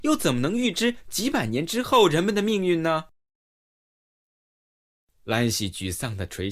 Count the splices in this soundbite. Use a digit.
1